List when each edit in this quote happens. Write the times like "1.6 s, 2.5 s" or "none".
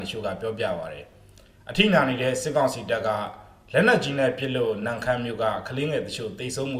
none